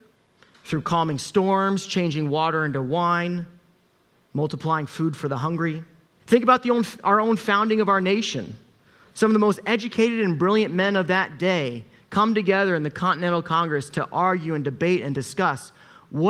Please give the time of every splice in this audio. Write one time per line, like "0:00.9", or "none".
0:06.2